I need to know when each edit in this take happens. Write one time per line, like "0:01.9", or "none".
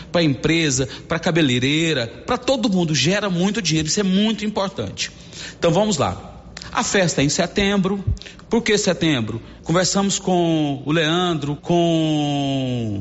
0:09.6
0:11.6